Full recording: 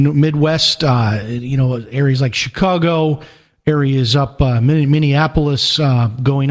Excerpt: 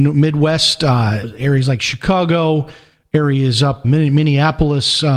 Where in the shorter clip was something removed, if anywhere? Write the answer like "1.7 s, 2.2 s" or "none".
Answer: 1.2 s, 3.8 s